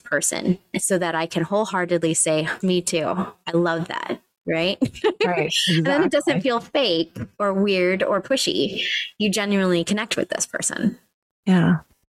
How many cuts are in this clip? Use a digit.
1